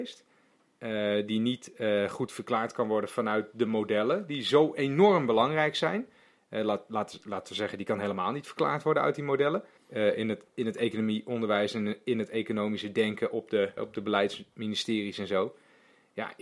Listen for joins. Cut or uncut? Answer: cut